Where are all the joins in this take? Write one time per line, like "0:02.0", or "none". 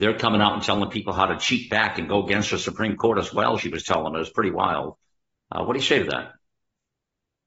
none